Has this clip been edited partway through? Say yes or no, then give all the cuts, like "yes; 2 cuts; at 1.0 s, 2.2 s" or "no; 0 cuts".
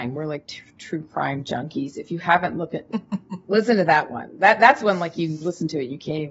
yes; 1 cut; at 2.9 s